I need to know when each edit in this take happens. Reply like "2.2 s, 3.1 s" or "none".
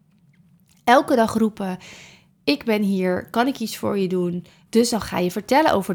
4.7 s